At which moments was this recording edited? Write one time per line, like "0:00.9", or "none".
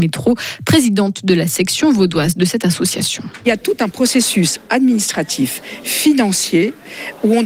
none